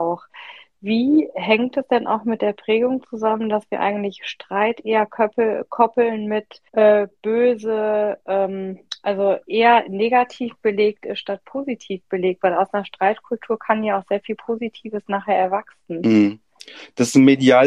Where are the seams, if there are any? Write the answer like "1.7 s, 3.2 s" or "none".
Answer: 6.7 s

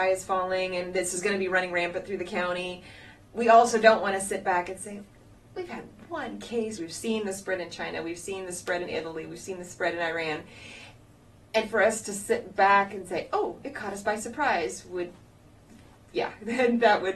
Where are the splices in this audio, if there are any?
6.8 s

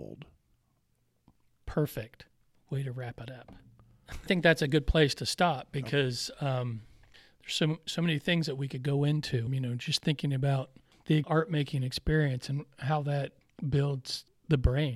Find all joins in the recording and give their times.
9.5 s

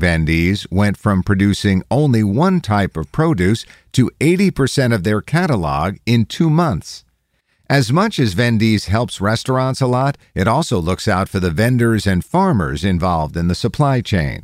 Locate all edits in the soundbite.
none

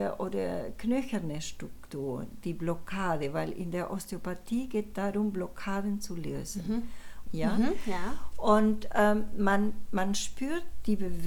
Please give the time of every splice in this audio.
7.2 s

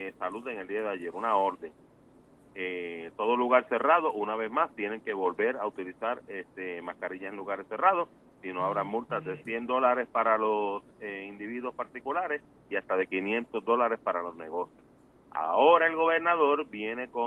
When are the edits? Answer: none

